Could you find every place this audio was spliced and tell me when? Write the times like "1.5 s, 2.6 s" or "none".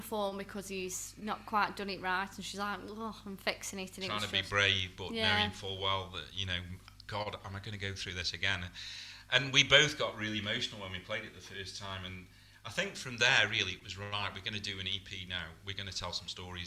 none